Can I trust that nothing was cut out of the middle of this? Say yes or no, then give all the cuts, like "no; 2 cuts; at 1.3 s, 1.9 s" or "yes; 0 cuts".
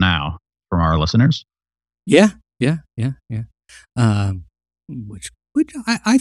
yes; 0 cuts